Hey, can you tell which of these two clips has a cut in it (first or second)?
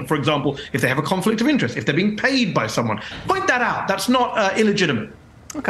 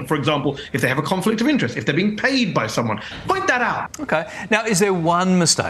second